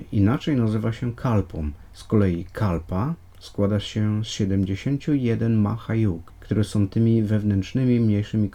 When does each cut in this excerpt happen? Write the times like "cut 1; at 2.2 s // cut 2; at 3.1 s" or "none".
none